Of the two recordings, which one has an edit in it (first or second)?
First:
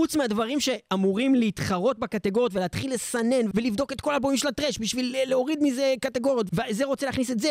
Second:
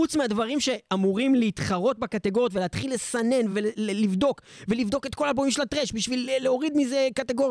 first